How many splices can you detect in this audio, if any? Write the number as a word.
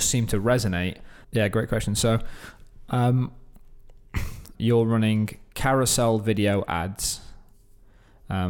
two